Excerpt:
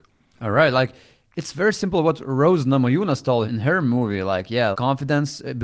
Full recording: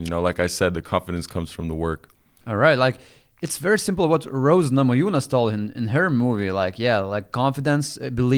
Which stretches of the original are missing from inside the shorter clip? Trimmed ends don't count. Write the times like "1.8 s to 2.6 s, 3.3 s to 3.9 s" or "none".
5.5 s to 5.7 s, 7.0 s to 7.3 s